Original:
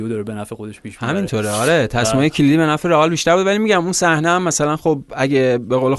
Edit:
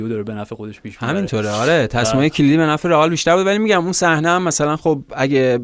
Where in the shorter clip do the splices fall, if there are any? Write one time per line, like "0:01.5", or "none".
none